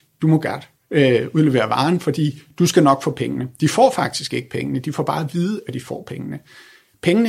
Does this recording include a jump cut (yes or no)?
no